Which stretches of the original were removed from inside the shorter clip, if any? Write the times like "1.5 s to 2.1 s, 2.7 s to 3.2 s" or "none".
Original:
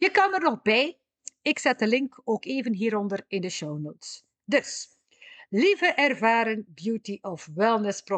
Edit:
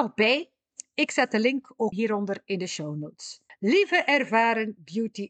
2.4 s to 2.8 s, 4.3 s to 5.4 s